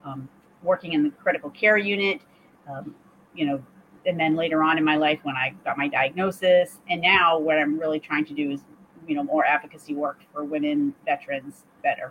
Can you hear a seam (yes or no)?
no